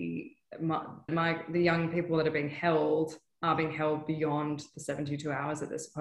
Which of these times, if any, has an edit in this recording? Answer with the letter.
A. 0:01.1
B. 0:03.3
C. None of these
A